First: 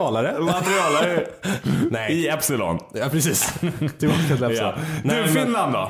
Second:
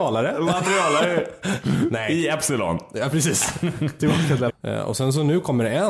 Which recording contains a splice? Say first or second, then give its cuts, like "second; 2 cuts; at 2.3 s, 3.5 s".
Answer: second; 1 cut; at 4.5 s